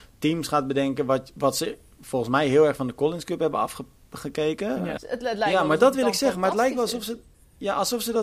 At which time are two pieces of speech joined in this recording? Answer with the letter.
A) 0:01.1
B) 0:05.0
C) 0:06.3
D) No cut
B